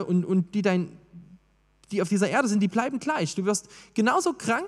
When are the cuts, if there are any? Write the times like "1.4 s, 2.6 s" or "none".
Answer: none